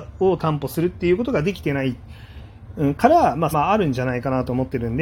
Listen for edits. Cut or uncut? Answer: cut